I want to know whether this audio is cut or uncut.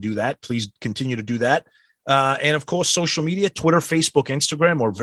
uncut